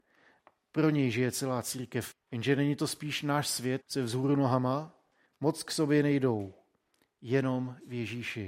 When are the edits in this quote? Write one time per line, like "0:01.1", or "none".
0:02.1
0:03.8
0:05.3